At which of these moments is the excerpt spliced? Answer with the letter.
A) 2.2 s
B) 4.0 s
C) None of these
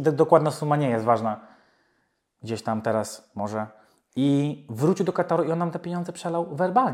C